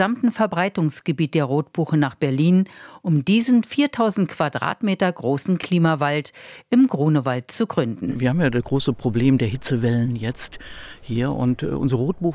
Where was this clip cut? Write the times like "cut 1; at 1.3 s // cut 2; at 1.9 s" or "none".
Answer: none